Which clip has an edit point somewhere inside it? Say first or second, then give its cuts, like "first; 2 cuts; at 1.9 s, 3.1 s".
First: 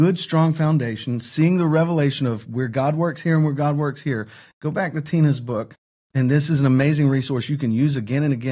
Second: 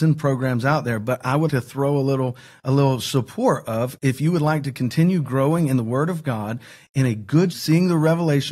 second; 2 cuts; at 1.5 s, 7.5 s